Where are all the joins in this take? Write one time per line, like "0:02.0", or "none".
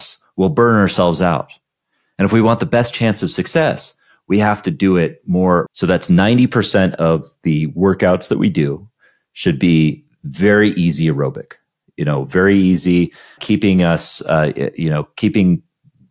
0:05.7
0:13.4